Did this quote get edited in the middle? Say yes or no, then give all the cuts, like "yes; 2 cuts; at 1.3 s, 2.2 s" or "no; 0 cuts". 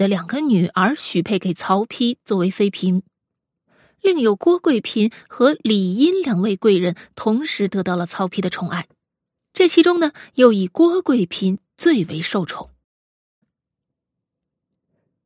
yes; 1 cut; at 13.4 s